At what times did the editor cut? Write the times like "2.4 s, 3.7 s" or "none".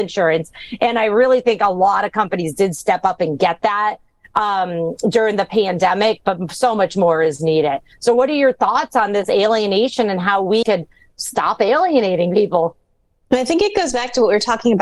10.6 s